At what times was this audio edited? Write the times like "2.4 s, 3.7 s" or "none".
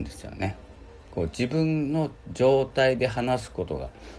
1.0 s